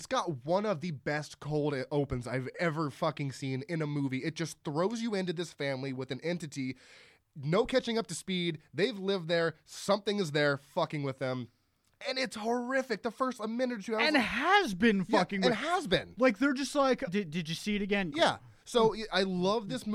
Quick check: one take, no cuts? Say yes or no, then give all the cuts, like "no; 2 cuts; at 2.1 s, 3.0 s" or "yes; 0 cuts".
no; 2 cuts; at 17.1 s, 18.1 s